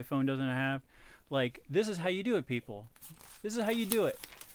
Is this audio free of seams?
yes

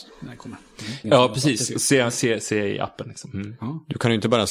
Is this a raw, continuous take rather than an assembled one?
no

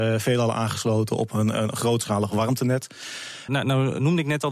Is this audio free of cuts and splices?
no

